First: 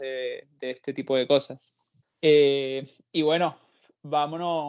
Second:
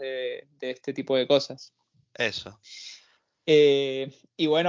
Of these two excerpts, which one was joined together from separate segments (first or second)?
first